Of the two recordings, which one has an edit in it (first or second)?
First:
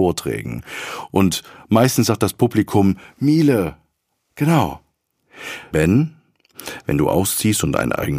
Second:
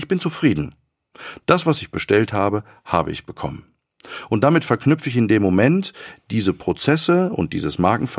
first